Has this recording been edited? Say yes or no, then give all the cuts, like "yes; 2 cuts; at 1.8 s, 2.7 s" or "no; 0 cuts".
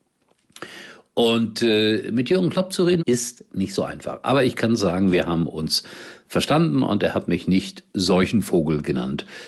yes; 1 cut; at 3.0 s